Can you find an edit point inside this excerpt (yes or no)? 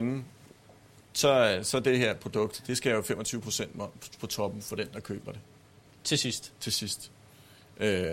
no